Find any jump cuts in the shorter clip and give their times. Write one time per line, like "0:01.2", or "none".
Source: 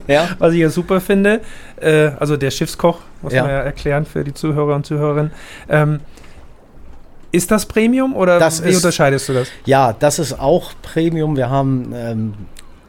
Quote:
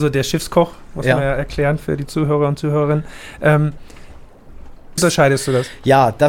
0:05.0